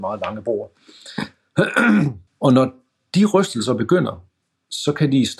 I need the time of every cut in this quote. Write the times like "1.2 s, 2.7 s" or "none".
2.3 s